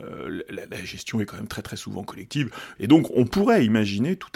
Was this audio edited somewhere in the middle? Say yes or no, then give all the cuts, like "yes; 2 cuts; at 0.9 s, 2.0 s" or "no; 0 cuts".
yes; 1 cut; at 2.8 s